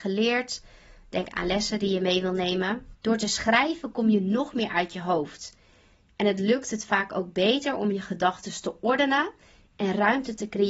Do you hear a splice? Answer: yes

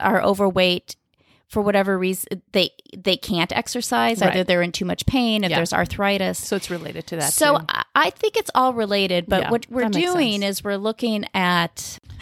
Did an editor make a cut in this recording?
no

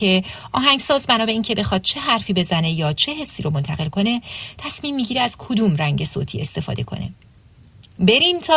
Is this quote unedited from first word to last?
yes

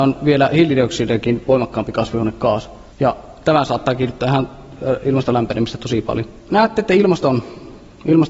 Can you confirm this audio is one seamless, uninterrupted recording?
no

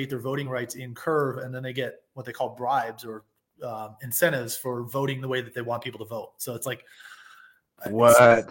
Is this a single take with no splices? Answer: yes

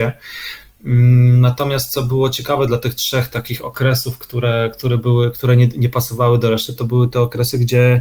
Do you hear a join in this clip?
no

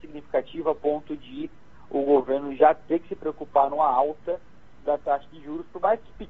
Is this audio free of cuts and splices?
yes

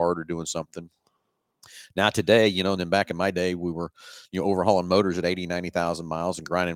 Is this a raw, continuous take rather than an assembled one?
yes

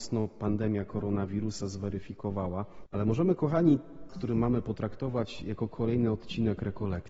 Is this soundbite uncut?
no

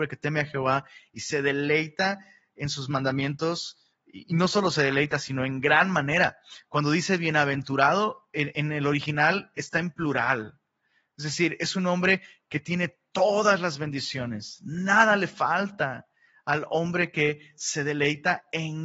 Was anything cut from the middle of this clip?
no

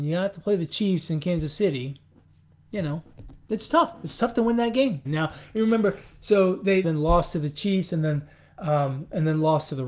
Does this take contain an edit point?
yes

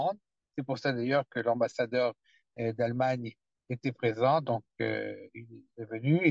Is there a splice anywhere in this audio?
no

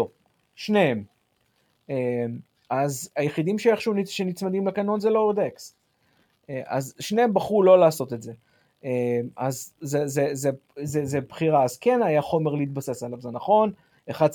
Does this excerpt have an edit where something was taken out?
no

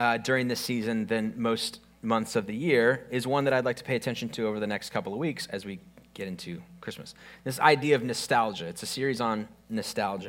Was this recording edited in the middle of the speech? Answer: no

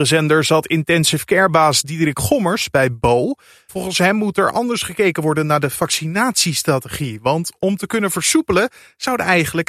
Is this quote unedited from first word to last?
yes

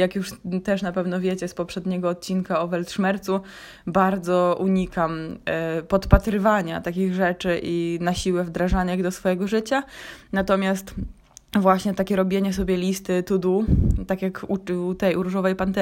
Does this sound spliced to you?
no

